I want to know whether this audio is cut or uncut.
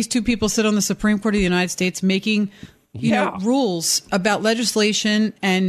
uncut